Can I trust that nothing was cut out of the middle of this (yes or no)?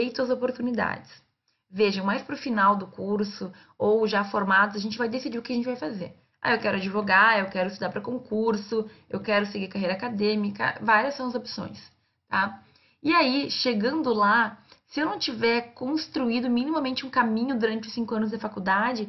yes